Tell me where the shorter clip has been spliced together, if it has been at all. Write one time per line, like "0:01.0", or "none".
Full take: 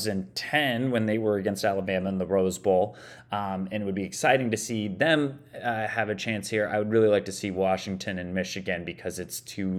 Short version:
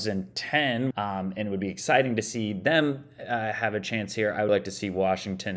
0:00.9
0:04.5